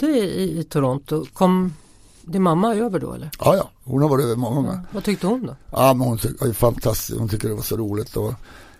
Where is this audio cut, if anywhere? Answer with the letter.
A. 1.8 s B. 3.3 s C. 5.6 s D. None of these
D